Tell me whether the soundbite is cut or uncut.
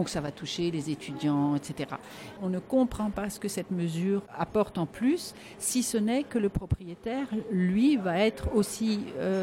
cut